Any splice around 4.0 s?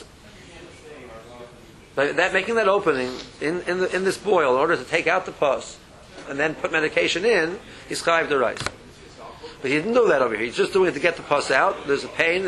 no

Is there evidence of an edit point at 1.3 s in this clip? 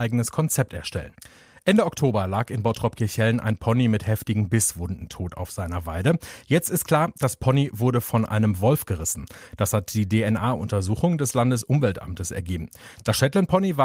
no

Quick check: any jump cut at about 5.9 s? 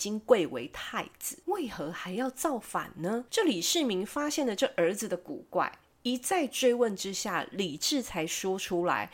no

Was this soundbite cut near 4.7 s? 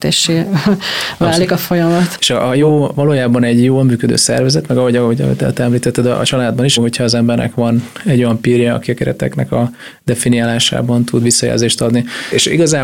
no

